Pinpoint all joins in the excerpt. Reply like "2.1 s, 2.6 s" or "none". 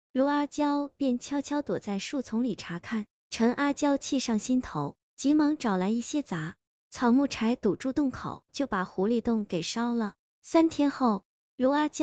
3.2 s, 8.5 s